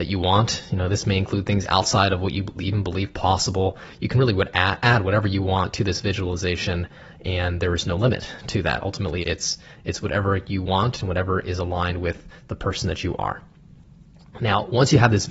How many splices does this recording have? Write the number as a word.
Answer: one